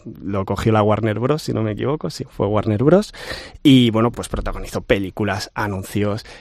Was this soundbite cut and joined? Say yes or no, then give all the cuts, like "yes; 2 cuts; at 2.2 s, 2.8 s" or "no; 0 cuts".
no; 0 cuts